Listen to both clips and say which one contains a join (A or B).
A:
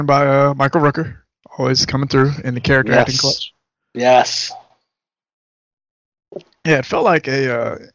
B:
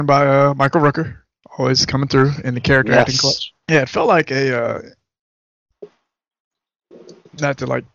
B